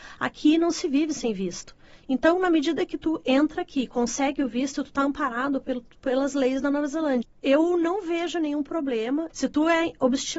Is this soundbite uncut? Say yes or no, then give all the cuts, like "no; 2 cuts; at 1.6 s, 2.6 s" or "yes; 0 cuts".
no; 3 cuts; at 2.0 s, 7.2 s, 9.3 s